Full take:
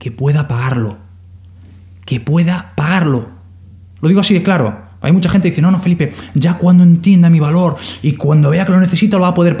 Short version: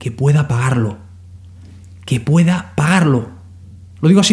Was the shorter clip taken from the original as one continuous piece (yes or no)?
yes